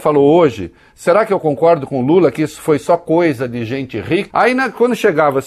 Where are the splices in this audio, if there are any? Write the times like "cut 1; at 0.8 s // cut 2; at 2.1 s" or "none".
cut 1; at 4.3 s